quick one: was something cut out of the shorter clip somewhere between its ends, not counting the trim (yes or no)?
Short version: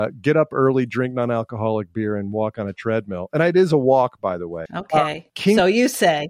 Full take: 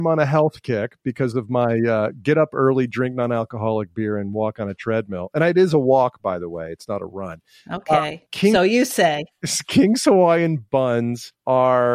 yes